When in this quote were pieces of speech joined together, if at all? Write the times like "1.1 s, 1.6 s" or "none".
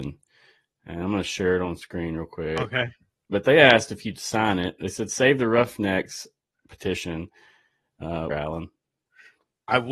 8.3 s